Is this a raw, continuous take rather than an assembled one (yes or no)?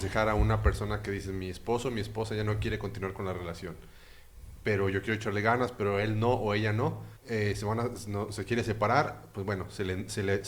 no